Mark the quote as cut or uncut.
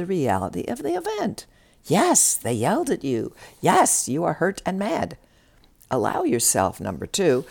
uncut